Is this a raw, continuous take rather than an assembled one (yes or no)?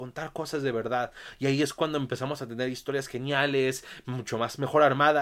yes